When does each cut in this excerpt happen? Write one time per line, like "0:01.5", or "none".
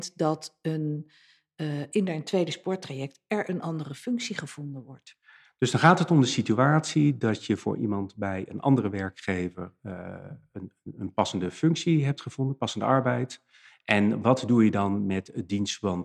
none